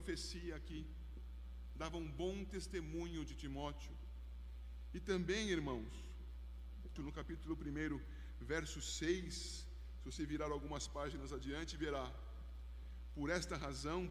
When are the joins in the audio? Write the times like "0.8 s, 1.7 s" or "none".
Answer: 7.0 s

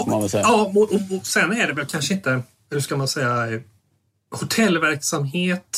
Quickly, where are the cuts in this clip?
none

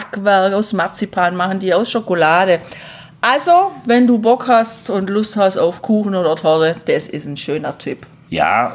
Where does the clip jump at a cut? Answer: none

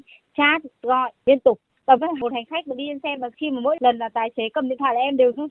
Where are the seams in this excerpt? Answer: 2.0 s

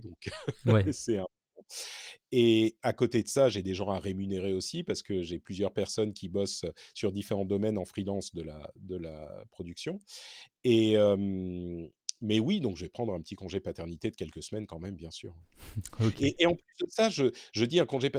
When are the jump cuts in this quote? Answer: none

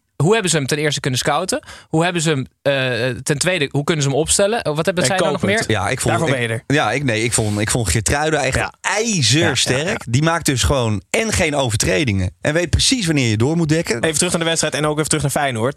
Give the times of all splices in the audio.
5.6 s, 12.4 s, 14.0 s

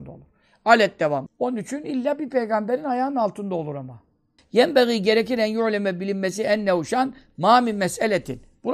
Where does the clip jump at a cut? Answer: 1.3 s, 4.4 s

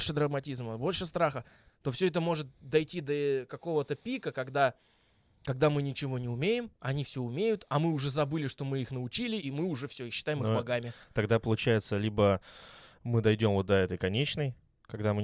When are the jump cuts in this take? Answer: 9.4 s

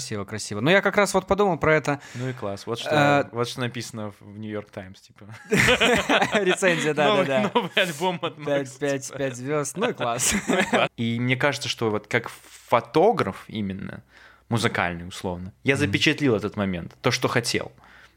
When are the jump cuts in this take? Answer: 10.9 s

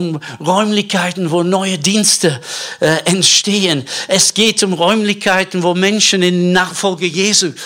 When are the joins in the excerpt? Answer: none

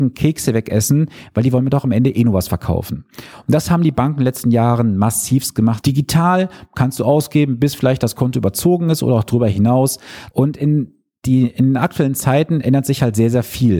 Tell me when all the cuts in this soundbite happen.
5.8 s, 10.3 s

